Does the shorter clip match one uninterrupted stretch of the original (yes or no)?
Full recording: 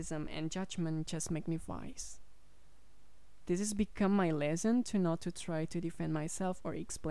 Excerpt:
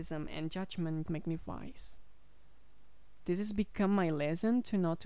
no